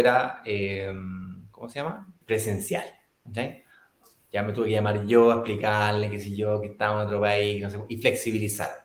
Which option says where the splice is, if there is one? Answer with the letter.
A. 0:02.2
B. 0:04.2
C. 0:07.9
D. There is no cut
A